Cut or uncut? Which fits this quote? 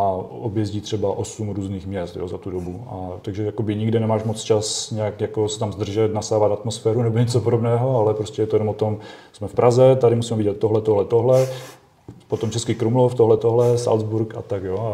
cut